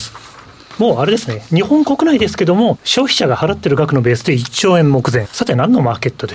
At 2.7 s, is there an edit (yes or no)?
yes